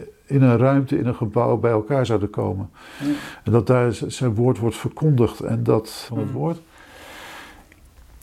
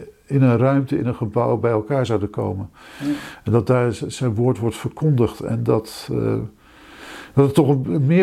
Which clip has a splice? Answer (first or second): first